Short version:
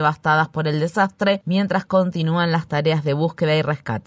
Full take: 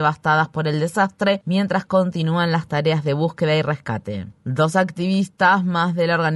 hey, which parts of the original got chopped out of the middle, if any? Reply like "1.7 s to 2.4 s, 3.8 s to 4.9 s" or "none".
none